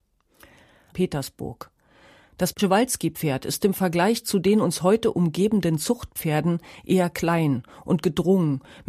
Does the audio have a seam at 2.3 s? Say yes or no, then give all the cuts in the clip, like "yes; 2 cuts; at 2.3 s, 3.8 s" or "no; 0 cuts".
no; 1 cut; at 0.9 s